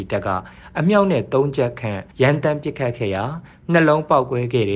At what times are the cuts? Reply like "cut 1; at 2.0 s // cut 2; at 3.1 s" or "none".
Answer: cut 1; at 2.1 s